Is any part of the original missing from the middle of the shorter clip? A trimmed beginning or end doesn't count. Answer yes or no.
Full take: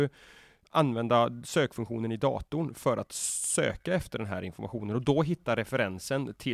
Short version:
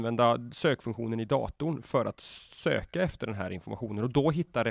no